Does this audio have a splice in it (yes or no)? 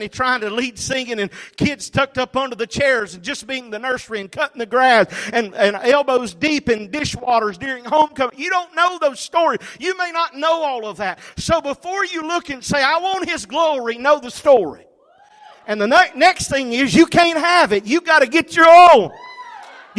no